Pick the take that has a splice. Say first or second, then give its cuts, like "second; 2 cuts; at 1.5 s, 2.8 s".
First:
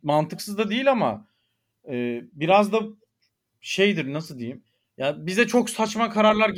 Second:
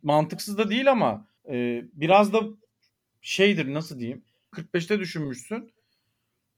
second; 2 cuts; at 1.4 s, 4.5 s